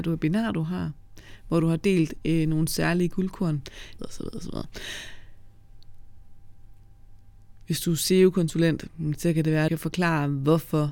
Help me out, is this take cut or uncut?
cut